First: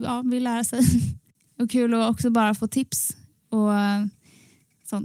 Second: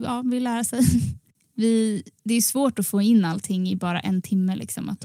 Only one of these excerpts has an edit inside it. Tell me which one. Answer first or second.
first